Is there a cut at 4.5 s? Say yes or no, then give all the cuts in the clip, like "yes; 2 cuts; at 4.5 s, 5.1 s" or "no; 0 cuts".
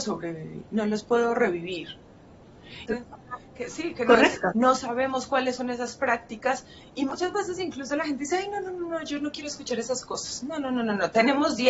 yes; 2 cuts; at 2.9 s, 4.5 s